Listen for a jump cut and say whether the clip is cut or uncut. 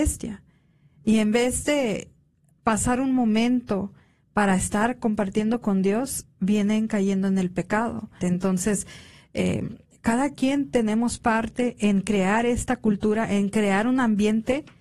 cut